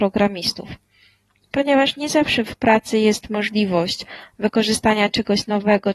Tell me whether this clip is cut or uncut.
uncut